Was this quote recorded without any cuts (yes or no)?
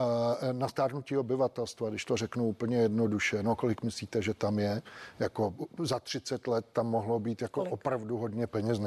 yes